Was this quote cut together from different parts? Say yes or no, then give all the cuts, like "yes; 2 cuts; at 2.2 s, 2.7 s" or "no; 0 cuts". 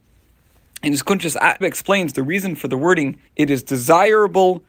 yes; 2 cuts; at 1.6 s, 3.3 s